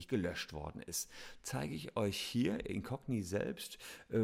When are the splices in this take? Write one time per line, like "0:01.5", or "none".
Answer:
0:01.4